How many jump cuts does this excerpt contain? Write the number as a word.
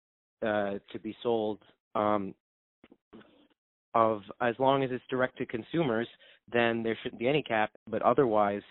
two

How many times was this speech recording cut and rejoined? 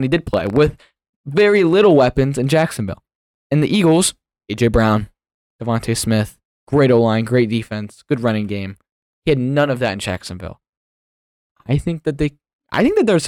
zero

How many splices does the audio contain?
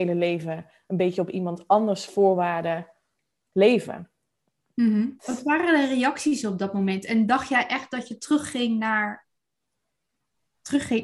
one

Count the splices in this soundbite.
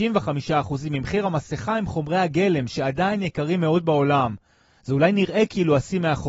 zero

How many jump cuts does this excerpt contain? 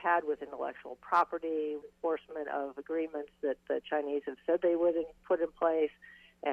two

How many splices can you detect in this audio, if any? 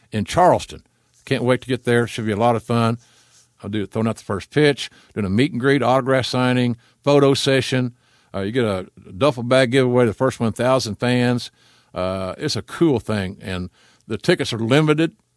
one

